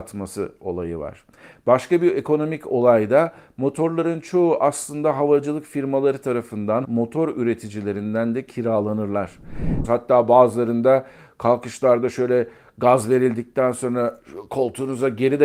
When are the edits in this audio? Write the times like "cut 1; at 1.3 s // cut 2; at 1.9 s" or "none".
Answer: cut 1; at 6.8 s // cut 2; at 9.8 s